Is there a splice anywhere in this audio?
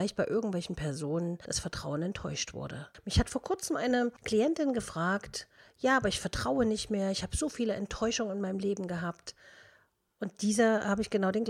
no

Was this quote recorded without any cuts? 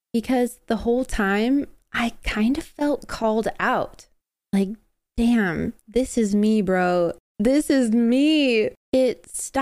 yes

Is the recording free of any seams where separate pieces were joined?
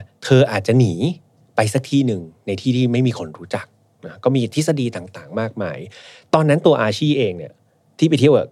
yes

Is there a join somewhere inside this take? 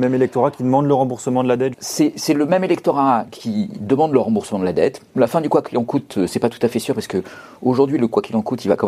yes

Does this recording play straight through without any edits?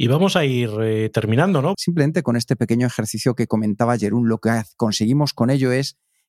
no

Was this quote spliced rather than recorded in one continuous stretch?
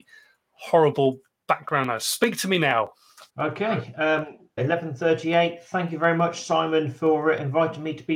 yes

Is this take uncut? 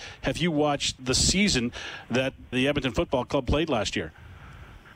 no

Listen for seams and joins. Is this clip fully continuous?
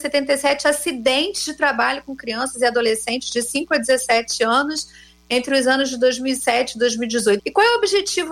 no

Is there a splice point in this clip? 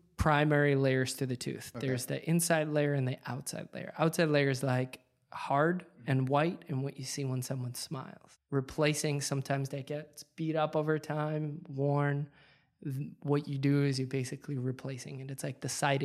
no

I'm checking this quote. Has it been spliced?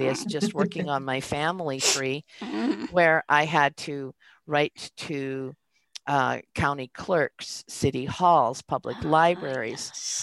no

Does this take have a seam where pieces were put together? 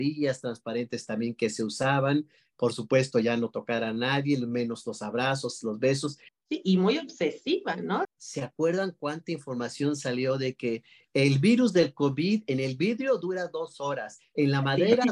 yes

